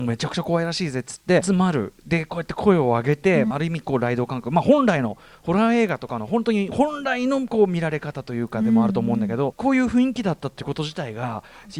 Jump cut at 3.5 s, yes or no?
yes